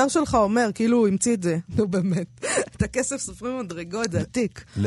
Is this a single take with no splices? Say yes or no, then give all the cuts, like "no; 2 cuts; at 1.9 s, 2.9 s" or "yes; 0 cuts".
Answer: no; 1 cut; at 1.6 s